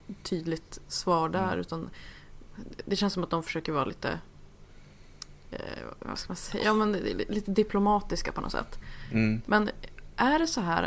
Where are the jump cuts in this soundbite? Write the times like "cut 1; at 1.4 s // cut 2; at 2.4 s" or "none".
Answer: none